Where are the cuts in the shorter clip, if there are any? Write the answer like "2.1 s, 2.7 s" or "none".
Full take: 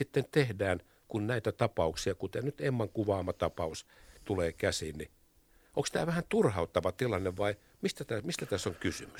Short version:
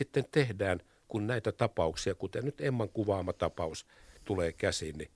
none